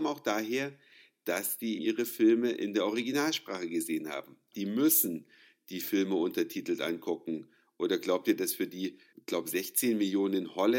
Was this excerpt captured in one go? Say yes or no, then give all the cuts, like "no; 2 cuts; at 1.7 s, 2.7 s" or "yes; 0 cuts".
no; 3 cuts; at 1.8 s, 4.5 s, 9.1 s